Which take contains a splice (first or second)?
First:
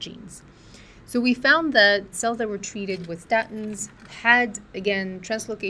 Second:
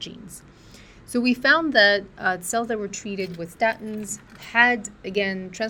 first